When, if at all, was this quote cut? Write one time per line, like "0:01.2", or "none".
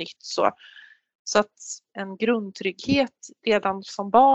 0:01.9